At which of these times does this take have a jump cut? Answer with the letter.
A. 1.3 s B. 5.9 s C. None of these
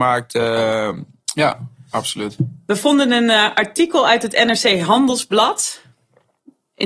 A